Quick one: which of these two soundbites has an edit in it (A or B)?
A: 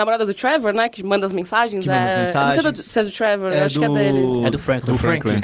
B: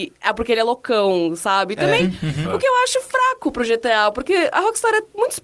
B